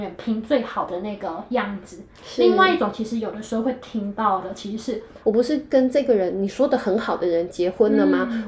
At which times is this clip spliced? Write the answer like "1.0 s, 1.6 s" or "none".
5.2 s